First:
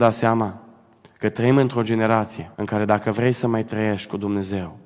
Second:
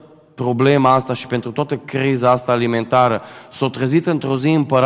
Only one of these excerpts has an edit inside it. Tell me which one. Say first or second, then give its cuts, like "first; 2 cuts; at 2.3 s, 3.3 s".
first; 1 cut; at 2.5 s